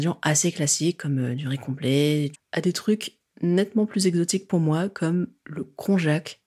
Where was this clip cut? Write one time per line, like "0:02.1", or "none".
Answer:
0:02.3